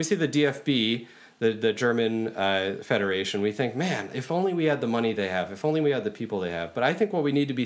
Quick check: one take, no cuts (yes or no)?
yes